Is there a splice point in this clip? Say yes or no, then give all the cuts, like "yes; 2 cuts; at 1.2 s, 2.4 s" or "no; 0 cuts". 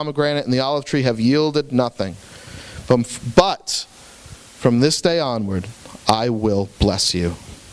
no; 0 cuts